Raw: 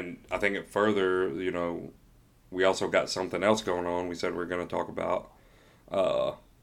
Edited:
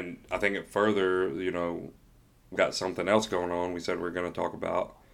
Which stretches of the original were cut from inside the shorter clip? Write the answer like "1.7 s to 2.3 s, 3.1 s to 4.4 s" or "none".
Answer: 2.6 s to 2.9 s